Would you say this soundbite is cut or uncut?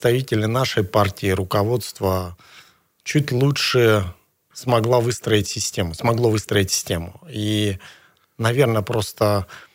uncut